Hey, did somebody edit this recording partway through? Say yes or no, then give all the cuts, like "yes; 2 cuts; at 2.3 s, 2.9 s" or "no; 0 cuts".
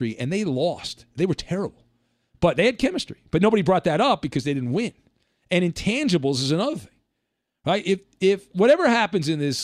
no; 0 cuts